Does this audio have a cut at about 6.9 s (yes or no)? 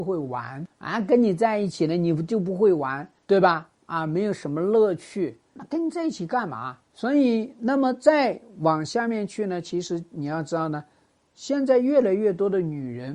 yes